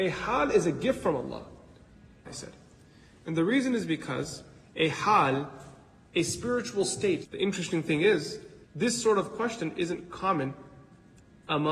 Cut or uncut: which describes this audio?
cut